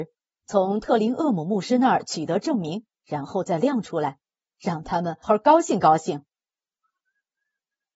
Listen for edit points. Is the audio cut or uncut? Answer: cut